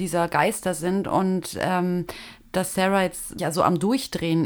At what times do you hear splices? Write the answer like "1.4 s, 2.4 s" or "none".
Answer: 3.4 s